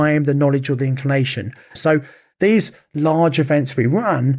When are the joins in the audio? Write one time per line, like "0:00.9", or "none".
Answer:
0:01.8